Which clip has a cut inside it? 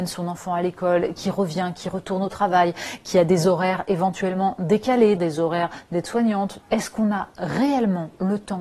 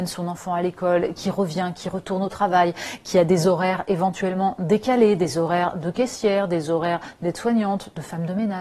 first; 2 cuts; at 5.2 s, 6.6 s

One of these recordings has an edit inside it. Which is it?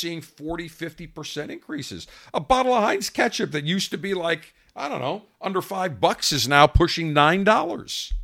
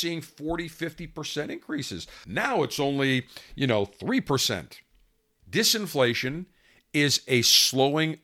second; 2 cuts; at 2.2 s, 5.4 s

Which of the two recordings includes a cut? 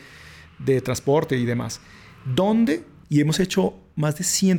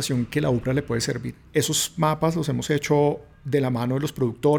first; 1 cut; at 3.0 s

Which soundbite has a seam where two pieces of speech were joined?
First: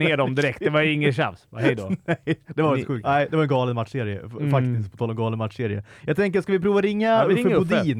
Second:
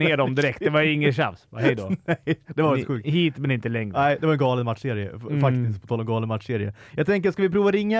first; 1 cut; at 3.0 s

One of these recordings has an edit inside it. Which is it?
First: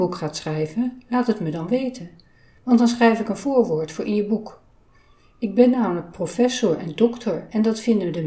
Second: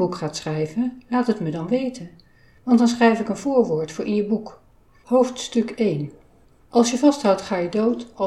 second; 1 cut; at 5.0 s

